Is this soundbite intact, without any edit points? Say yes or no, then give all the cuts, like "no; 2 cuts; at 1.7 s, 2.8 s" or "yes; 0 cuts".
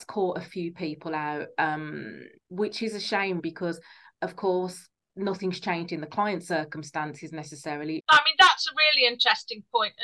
no; 2 cuts; at 3.4 s, 8.0 s